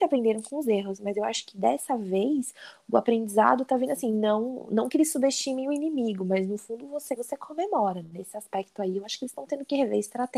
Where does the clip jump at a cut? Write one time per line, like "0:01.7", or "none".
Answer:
0:07.2